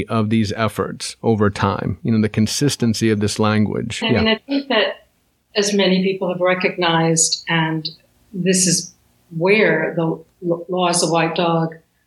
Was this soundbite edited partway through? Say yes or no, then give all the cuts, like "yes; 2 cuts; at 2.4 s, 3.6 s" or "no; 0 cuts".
yes; 1 cut; at 4.0 s